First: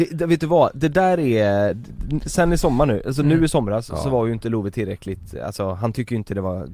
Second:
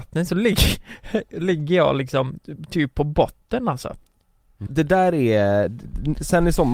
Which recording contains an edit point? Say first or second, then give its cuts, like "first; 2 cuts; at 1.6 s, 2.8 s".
second; 1 cut; at 4.7 s